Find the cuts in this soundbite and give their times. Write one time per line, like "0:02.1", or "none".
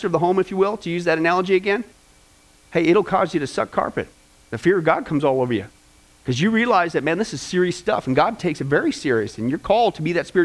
none